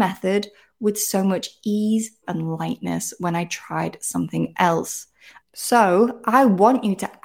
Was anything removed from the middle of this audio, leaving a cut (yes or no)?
yes